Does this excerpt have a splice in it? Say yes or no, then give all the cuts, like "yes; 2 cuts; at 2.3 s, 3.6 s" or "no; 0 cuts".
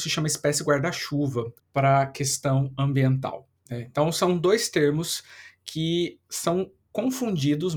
yes; 1 cut; at 1.6 s